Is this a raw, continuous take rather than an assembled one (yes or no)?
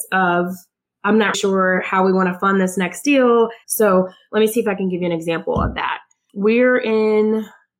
no